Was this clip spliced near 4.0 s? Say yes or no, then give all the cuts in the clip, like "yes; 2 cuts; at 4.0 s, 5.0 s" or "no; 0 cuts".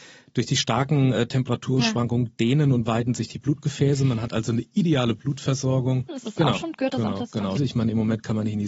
no; 2 cuts; at 6.1 s, 7.6 s